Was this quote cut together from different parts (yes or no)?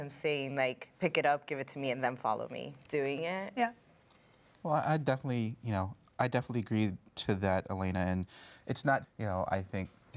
yes